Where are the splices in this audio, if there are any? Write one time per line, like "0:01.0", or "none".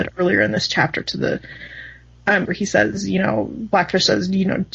0:02.5